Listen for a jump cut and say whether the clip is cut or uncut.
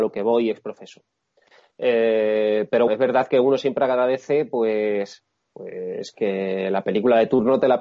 cut